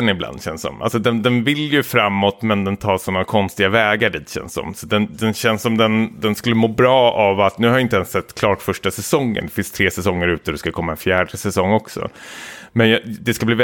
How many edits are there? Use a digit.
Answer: 0